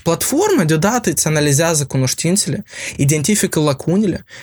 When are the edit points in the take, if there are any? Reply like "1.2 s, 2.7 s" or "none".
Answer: none